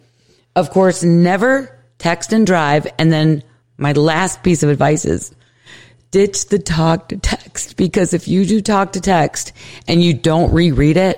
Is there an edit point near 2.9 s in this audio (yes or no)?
no